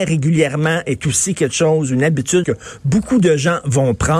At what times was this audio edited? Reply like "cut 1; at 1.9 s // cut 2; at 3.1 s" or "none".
cut 1; at 2.4 s